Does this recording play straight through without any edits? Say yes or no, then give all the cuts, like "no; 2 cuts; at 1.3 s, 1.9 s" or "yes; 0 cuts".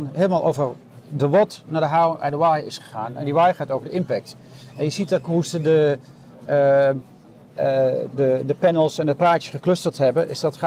yes; 0 cuts